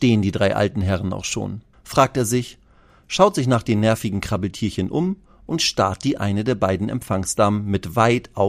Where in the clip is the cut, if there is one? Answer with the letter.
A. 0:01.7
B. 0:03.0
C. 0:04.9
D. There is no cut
A